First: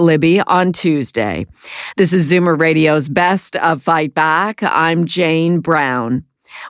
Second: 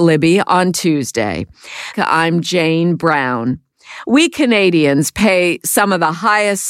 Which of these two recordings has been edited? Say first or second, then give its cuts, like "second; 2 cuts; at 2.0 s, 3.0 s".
second; 1 cut; at 1.9 s